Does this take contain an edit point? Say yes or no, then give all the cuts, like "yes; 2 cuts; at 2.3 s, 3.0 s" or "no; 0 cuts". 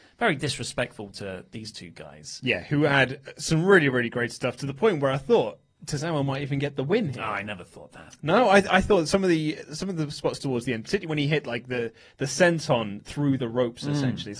no; 0 cuts